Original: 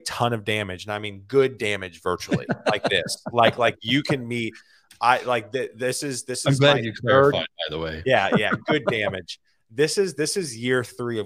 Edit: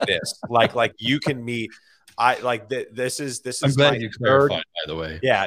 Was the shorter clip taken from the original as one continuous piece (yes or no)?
yes